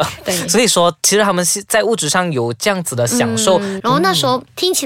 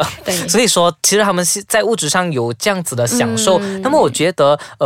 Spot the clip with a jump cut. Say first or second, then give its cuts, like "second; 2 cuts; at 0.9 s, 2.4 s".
first; 1 cut; at 3.8 s